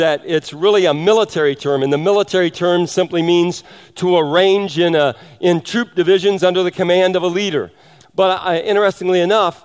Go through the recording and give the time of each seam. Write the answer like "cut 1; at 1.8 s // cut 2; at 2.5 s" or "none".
cut 1; at 8.0 s

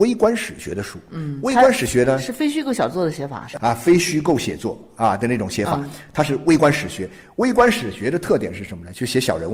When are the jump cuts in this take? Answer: none

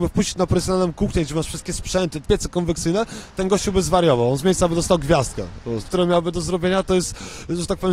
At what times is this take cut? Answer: cut 1; at 2.2 s // cut 2; at 5.9 s

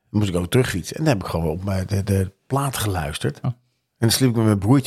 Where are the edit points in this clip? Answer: cut 1; at 2.0 s // cut 2; at 3.4 s

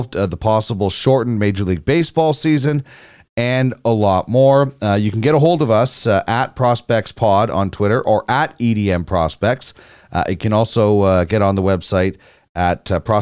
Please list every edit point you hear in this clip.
none

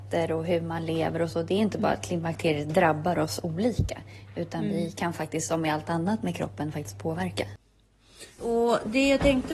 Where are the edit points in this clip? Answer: cut 1; at 8.4 s

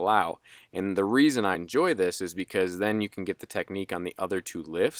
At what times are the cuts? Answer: cut 1; at 1.5 s

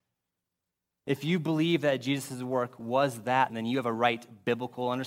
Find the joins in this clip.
cut 1; at 3.5 s

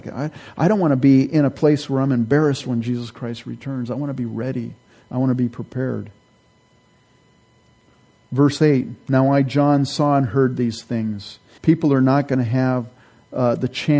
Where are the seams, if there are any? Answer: cut 1; at 11.6 s

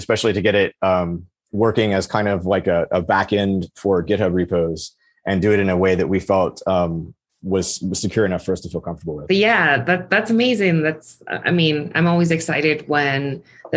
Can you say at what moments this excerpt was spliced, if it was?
none

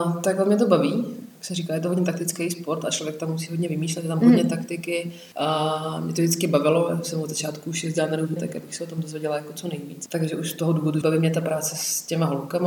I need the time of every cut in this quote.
cut 1; at 8.4 s // cut 2; at 11.0 s

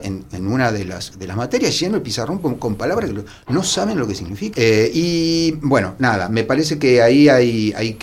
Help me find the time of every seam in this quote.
cut 1; at 4.5 s

